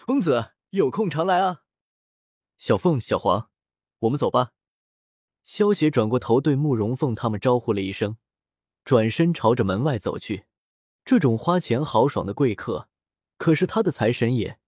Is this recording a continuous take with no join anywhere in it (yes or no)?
no